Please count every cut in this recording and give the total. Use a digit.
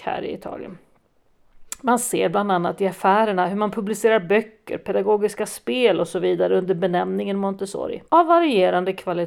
1